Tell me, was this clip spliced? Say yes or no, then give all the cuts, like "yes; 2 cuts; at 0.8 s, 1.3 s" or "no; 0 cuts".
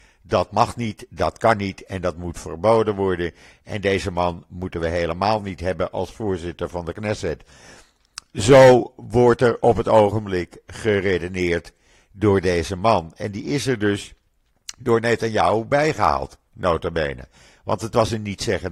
no; 0 cuts